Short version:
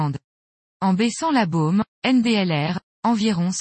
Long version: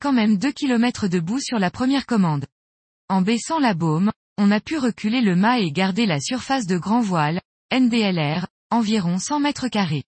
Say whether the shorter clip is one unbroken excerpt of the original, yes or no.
no